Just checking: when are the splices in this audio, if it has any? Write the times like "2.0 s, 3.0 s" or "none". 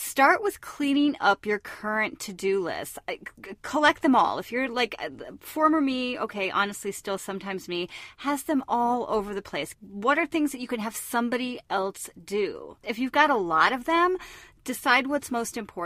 9.7 s, 12.8 s